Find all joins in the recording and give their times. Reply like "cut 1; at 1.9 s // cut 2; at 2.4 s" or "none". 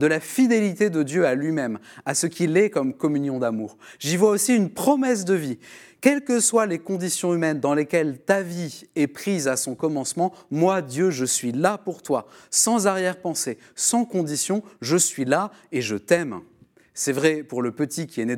none